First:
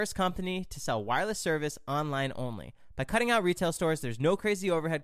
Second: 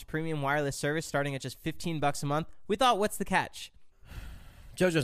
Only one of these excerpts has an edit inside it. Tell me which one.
second; 1 cut; at 3.9 s

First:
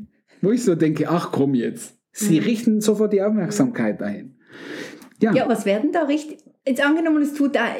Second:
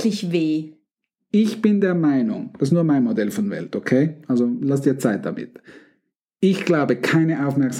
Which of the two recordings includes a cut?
first; 2 cuts; at 2.0 s, 5.4 s

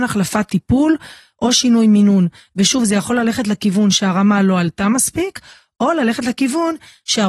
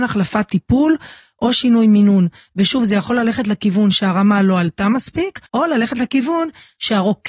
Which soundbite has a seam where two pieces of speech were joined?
second; 1 cut; at 5.5 s

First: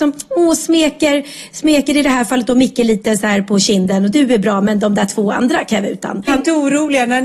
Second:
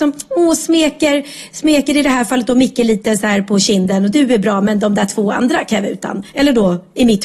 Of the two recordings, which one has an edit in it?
first; 1 cut; at 6.3 s

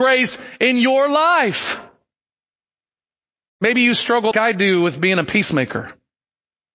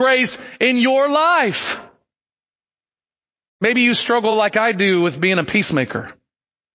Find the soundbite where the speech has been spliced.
first; 1 cut; at 4.3 s

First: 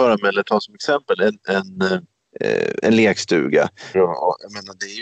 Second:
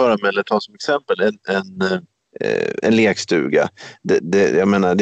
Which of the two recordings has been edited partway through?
first; 1 cut; at 3.9 s

